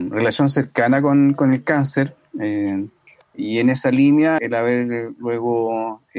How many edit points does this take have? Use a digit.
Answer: 2